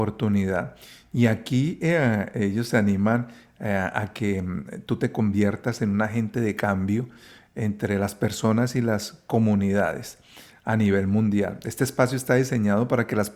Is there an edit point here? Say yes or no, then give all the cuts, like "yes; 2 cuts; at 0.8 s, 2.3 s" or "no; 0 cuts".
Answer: no; 0 cuts